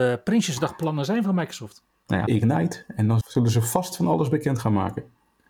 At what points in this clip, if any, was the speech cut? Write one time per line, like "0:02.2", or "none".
0:02.3

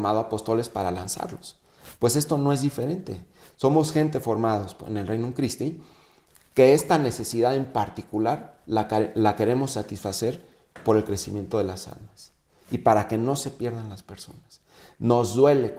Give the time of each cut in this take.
none

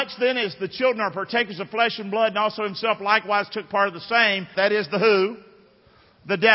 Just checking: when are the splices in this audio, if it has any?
0:04.5

